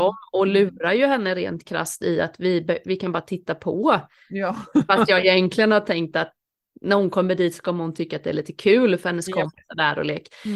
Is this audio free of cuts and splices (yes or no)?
yes